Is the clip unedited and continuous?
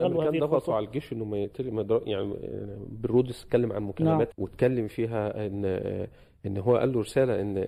no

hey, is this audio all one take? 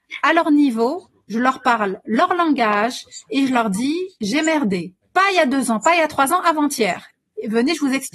no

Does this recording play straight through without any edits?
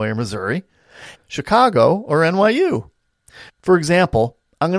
no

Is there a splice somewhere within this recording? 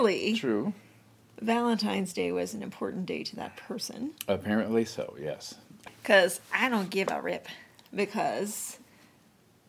yes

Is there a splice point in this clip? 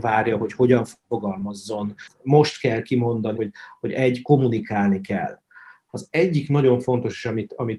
yes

